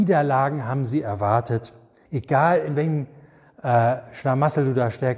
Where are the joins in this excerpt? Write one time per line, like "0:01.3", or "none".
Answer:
0:02.1

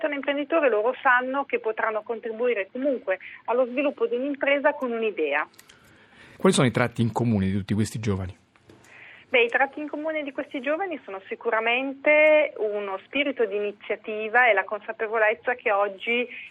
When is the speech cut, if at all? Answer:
0:06.4

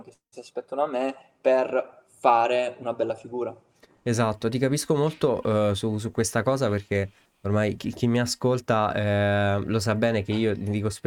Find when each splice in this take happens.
0:07.8

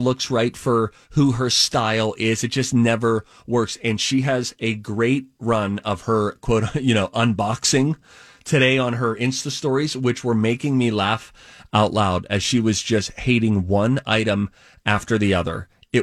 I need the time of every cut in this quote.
none

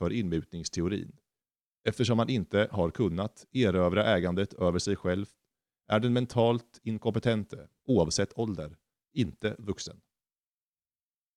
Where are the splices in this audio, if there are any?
none

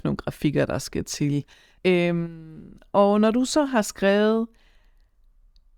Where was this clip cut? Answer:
0:01.8

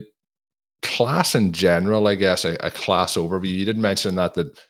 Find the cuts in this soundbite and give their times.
none

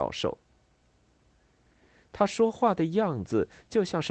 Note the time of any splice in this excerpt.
none

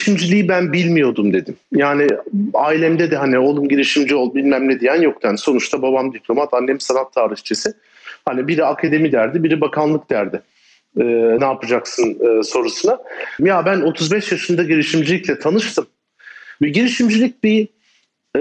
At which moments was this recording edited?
0:11.4
0:13.4
0:16.6

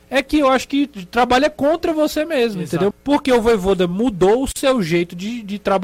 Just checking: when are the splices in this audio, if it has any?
0:02.9

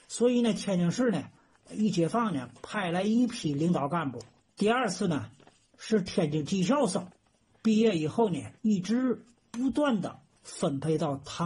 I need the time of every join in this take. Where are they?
0:04.5
0:08.6

